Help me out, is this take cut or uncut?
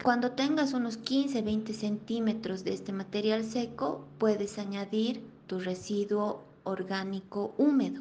uncut